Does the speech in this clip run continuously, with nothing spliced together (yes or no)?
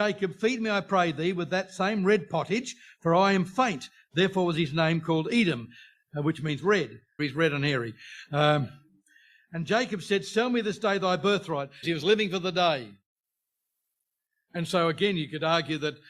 no